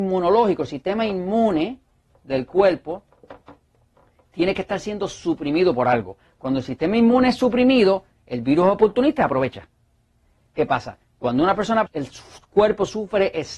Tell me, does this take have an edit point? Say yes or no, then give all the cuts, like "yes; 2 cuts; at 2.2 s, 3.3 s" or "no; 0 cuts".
yes; 2 cuts; at 10.4 s, 11.9 s